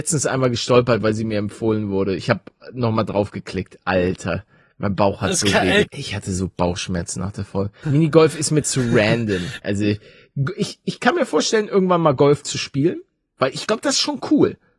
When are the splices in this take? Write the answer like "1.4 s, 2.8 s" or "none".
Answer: 5.9 s, 7.8 s, 9.6 s